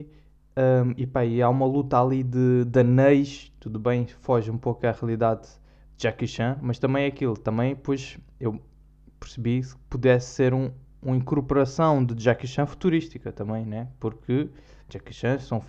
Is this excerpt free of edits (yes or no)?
yes